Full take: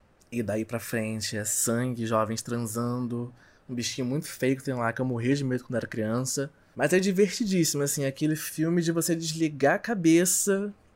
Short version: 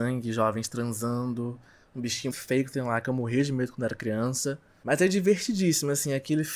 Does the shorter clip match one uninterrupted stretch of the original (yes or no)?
no